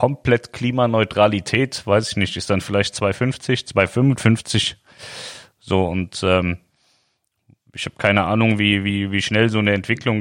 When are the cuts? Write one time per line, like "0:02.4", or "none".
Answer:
none